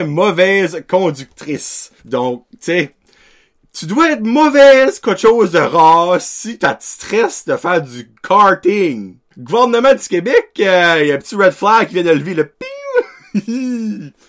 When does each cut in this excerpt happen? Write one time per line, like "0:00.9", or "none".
0:02.0
0:09.3